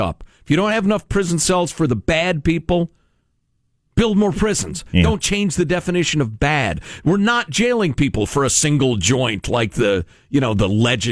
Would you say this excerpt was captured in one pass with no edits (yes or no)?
yes